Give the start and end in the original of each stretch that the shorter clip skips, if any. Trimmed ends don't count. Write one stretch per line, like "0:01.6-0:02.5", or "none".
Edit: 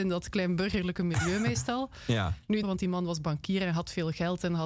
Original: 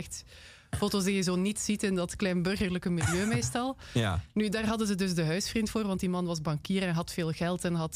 0:04.5-0:05.8

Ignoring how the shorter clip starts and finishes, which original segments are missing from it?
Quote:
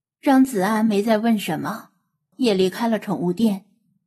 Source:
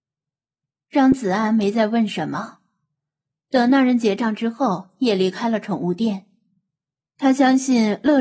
0:03.0-0:04.9

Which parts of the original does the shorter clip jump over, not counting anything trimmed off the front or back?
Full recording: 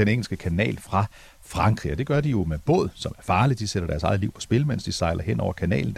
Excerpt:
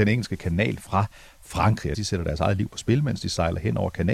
0:01.9-0:03.6

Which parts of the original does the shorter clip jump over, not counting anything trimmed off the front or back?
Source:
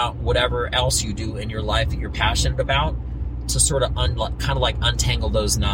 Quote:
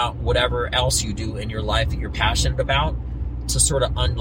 none

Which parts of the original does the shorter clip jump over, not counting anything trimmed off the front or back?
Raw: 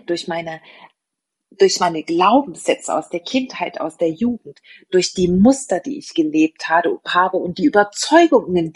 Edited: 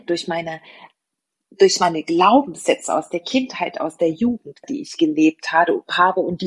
0:04.6-0:05.8

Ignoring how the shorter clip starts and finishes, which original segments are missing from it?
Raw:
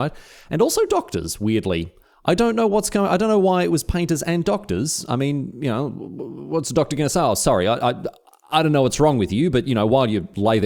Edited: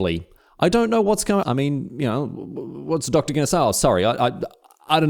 0:03.1-0:05.0

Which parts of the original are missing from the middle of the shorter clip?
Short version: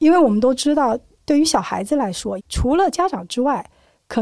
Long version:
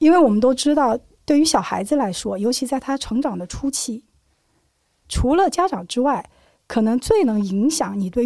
0:02.4-0:05.0

